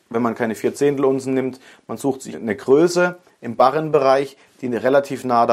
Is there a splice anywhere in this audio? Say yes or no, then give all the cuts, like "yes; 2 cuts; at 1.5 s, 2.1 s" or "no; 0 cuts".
yes; 1 cut; at 2.3 s